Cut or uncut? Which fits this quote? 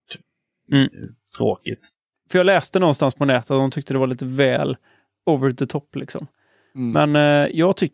cut